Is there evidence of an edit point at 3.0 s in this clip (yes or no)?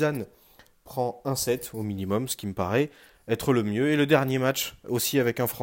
no